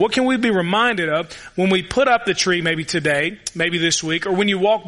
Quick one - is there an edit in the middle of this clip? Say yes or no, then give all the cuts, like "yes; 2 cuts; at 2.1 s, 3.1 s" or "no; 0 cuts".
no; 0 cuts